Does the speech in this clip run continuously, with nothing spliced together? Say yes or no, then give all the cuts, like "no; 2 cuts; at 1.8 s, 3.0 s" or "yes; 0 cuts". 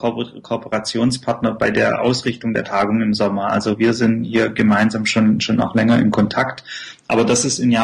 yes; 0 cuts